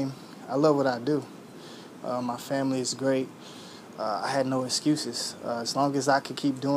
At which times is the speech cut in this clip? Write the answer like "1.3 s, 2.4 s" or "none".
2.0 s